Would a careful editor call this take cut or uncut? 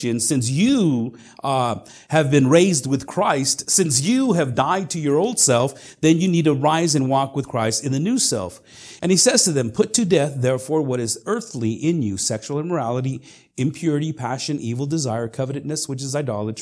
cut